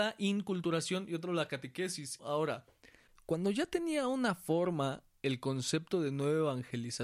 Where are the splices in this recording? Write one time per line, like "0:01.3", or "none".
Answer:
0:02.2